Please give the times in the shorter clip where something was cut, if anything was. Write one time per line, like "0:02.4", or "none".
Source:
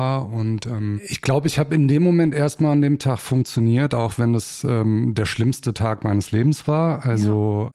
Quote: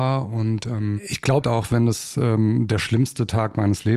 0:01.4